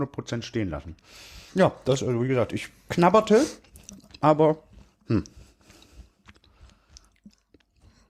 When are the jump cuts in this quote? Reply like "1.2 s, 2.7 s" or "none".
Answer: 1.5 s